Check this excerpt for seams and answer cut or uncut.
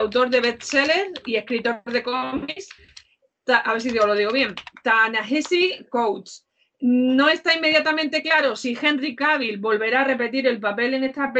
uncut